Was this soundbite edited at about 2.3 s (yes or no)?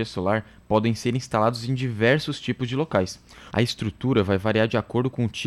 no